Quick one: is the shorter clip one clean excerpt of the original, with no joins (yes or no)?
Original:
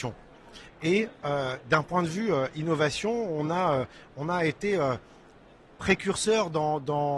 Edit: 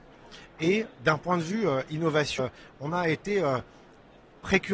no